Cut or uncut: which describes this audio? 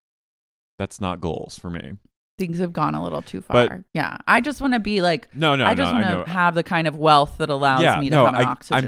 uncut